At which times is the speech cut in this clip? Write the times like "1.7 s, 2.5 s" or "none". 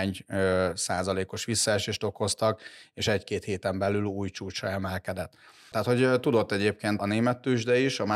5.7 s, 7.0 s